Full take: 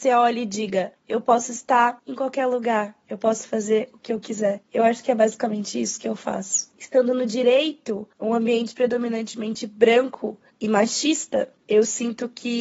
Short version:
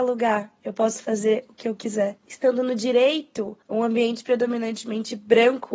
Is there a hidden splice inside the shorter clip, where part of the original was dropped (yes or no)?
yes